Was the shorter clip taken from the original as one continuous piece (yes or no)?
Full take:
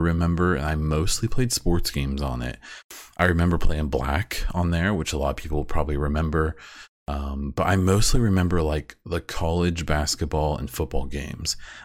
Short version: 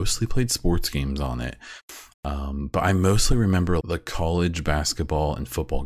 no